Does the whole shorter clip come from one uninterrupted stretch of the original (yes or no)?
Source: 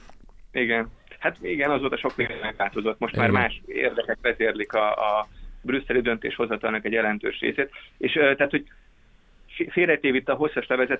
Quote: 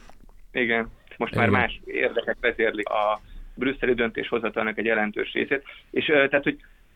no